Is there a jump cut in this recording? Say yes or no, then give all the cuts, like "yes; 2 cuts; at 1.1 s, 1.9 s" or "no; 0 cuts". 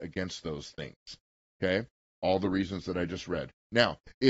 yes; 1 cut; at 2.1 s